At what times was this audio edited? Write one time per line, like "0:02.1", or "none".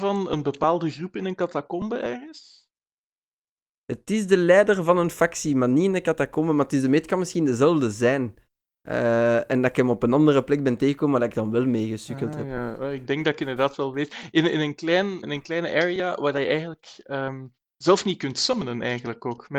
0:15.2